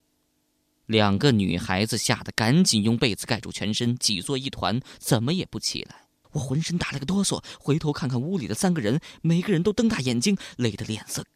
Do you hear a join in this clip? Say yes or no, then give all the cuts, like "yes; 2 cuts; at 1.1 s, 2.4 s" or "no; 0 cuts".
yes; 1 cut; at 6.2 s